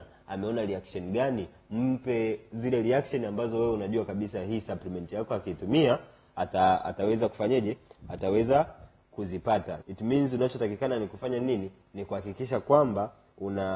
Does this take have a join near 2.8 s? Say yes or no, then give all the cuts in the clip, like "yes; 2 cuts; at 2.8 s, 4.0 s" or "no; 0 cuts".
no; 1 cut; at 9.8 s